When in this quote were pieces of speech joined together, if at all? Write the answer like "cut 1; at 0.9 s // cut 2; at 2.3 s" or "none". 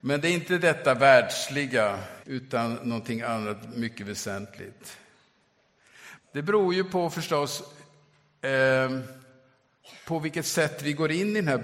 cut 1; at 2.2 s // cut 2; at 6.2 s